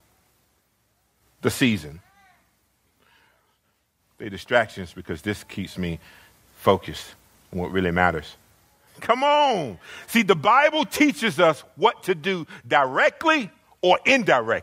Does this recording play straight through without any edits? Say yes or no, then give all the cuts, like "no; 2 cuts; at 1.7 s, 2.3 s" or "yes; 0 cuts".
no; 1 cut; at 8.9 s